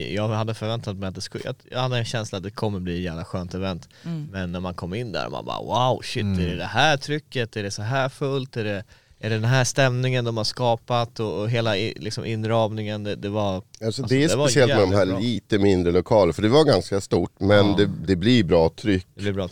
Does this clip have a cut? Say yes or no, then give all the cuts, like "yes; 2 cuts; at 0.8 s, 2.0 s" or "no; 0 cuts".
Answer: no; 0 cuts